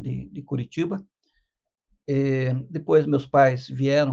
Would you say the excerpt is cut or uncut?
uncut